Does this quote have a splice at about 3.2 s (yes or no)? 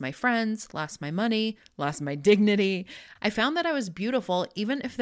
yes